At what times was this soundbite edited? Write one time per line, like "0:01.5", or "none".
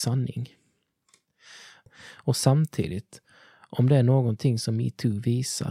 0:01.9